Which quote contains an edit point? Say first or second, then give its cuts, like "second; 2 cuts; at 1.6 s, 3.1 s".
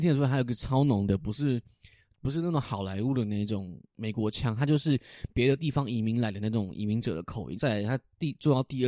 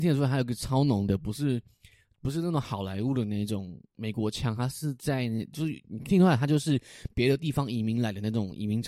first; 2 cuts; at 4.6 s, 7.6 s